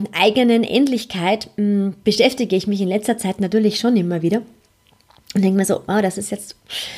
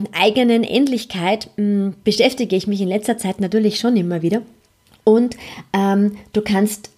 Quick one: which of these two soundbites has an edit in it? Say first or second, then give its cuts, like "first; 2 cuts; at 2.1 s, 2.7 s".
second; 1 cut; at 4.9 s